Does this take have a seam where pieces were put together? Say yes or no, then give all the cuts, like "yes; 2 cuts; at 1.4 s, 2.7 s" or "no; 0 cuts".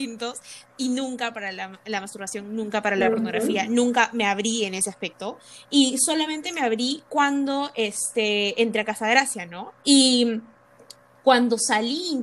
yes; 1 cut; at 9.8 s